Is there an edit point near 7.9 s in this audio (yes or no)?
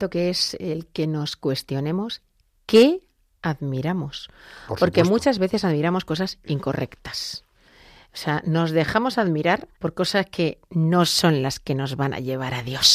no